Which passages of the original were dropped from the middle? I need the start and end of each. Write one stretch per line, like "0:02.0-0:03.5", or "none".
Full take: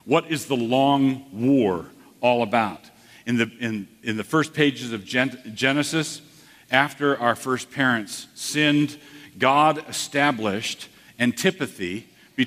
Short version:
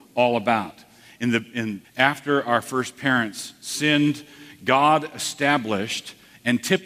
0:03.9-0:06.6